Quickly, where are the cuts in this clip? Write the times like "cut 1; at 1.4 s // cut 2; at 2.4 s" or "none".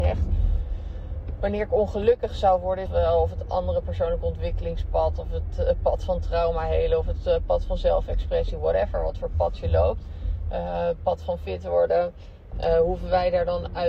cut 1; at 2.9 s // cut 2; at 12.5 s